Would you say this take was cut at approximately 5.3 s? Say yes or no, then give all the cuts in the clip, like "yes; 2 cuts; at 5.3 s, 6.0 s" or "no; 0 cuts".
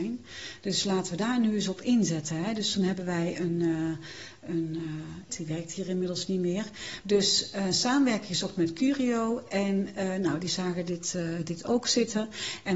yes; 2 cuts; at 5.3 s, 7.0 s